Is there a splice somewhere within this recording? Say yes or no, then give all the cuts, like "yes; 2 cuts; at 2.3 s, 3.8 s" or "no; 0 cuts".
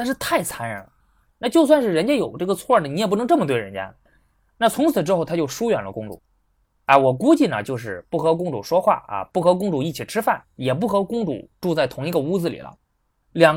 no; 0 cuts